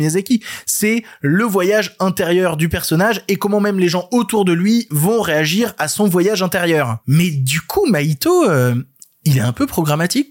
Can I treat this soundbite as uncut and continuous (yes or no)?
yes